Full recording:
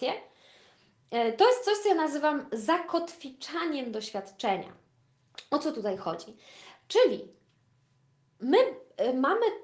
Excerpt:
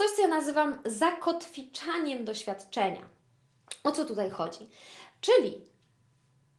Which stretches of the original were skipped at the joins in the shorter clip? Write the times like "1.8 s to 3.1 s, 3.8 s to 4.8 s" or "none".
none